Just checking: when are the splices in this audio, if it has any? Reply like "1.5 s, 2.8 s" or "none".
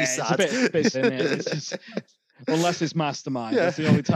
0.9 s